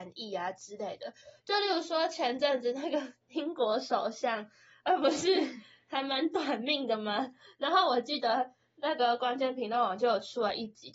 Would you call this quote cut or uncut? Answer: uncut